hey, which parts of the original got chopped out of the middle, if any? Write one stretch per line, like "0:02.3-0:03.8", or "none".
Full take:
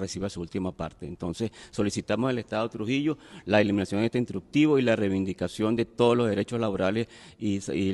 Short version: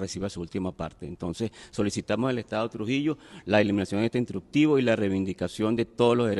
none